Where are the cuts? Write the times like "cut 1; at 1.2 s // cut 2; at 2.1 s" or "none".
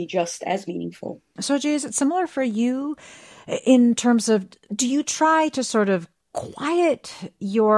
cut 1; at 1.4 s